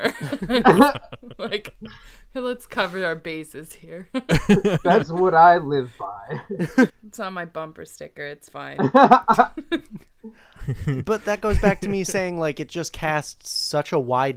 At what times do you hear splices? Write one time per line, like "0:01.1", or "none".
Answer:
0:06.9

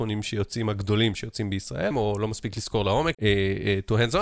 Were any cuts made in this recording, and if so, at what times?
0:01.9
0:03.1

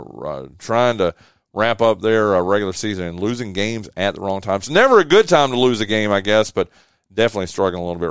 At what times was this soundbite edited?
none

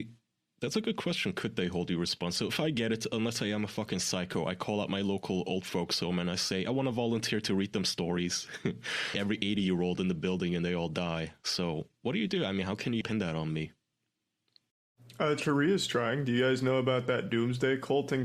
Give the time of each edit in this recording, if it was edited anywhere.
0:09.1
0:13.0

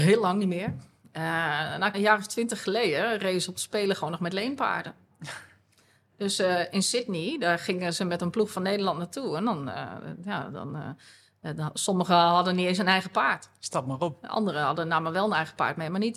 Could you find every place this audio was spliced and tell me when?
0:01.9

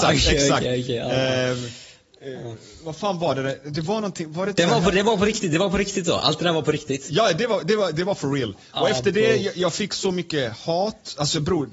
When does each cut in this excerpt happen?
none

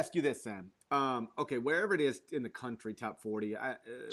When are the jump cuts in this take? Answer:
0:02.9

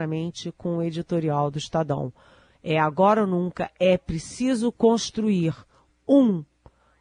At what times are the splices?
none

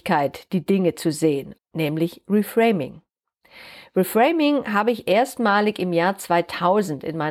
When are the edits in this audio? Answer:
0:01.6

